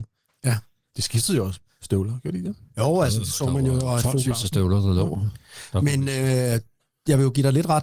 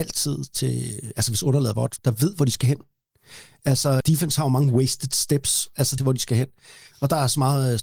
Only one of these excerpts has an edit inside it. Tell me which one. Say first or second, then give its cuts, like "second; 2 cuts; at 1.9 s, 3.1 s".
second; 3 cuts; at 2.0 s, 4.0 s, 6.0 s